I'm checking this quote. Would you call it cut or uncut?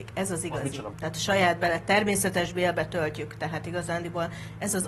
cut